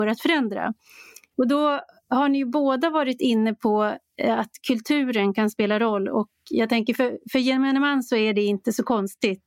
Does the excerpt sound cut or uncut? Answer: cut